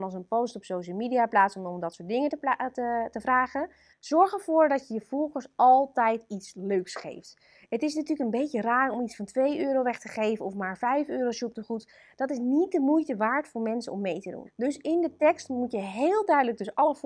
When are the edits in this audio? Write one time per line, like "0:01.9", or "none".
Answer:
0:03.9
0:14.5